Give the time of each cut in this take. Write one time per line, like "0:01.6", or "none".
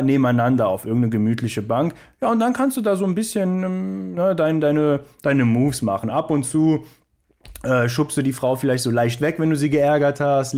none